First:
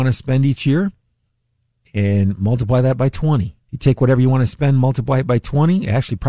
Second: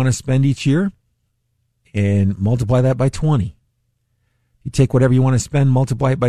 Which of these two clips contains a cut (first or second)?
first